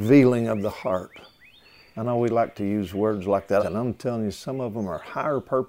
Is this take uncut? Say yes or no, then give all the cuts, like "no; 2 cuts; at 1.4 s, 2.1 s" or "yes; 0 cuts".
no; 2 cuts; at 1.9 s, 3.6 s